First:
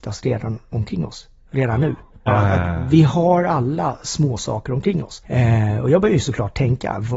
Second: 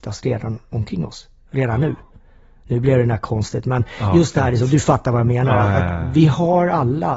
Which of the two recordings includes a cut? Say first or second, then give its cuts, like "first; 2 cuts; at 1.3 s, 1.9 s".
first; 2 cuts; at 2.3 s, 5.2 s